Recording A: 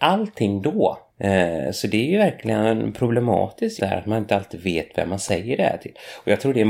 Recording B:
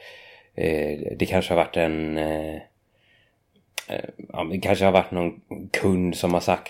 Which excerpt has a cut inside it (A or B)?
A